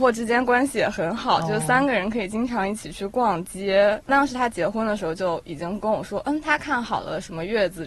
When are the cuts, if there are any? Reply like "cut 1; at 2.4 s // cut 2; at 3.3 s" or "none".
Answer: cut 1; at 4.0 s